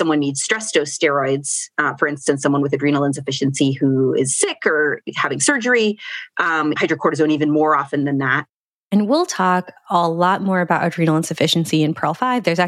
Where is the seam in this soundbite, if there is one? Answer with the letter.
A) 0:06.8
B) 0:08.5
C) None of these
A